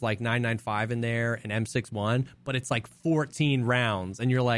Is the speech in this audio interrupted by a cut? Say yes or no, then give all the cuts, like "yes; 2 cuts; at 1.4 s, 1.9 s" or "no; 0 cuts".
no; 0 cuts